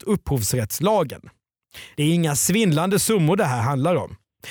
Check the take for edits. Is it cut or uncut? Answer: uncut